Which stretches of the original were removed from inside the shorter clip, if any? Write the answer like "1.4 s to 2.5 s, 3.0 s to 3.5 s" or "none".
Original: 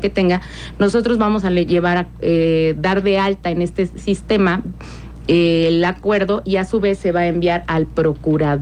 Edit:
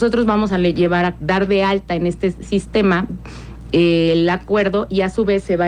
2.1 s to 2.8 s